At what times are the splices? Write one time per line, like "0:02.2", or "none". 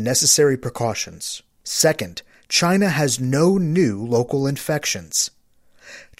0:01.5